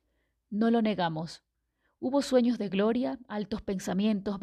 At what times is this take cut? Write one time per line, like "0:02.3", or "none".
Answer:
none